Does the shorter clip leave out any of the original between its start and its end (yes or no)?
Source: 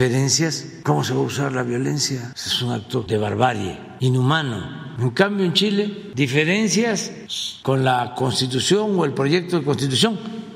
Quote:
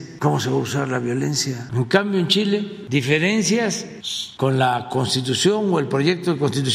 yes